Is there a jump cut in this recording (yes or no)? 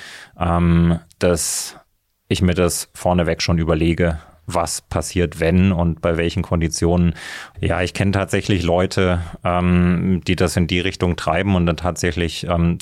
yes